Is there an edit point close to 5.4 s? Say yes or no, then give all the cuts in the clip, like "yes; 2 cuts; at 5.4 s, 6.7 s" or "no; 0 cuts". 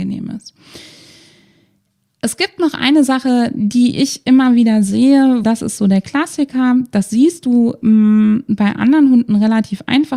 yes; 1 cut; at 5.4 s